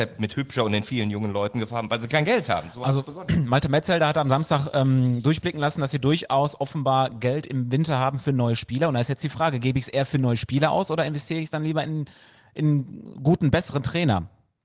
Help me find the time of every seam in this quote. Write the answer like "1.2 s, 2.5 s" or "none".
none